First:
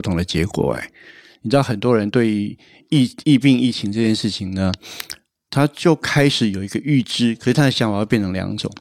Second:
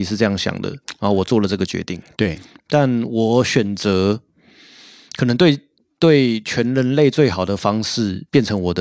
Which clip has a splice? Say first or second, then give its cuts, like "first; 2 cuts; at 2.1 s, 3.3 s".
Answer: second; 1 cut; at 2.1 s